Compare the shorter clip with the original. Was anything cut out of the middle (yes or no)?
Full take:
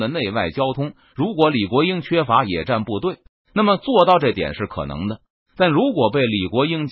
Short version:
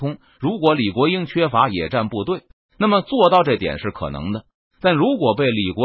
no